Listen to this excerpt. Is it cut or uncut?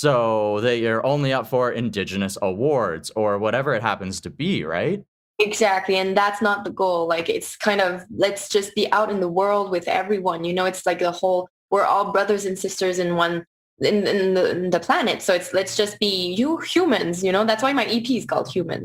uncut